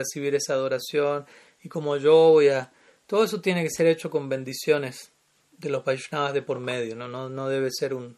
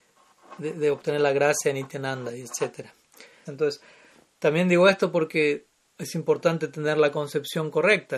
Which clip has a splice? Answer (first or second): second